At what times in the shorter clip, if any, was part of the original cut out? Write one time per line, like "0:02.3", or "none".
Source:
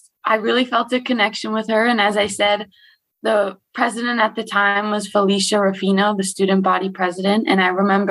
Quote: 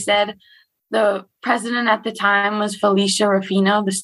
none